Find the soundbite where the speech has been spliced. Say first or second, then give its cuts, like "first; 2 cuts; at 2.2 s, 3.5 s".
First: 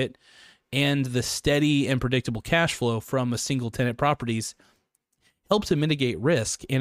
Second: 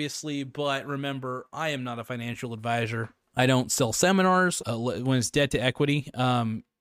second; 2 cuts; at 3.3 s, 4.6 s